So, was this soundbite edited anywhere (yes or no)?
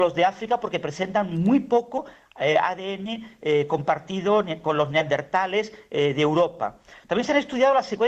no